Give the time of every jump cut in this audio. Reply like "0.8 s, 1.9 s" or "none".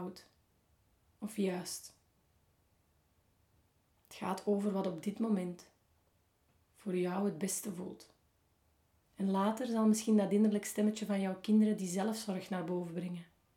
1.1 s, 9.0 s